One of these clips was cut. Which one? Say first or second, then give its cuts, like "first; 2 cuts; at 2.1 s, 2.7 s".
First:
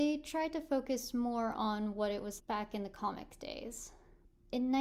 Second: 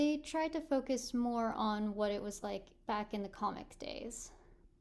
first; 1 cut; at 2.4 s